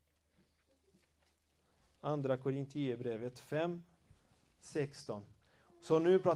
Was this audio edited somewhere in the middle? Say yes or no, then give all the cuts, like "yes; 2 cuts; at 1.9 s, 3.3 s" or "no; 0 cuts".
no; 0 cuts